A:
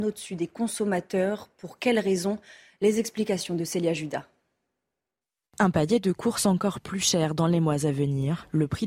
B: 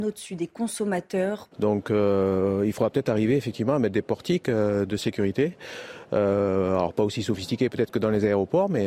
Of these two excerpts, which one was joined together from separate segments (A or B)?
B